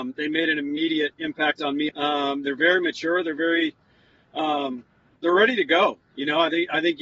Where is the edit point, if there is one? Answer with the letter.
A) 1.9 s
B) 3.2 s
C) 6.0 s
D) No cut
A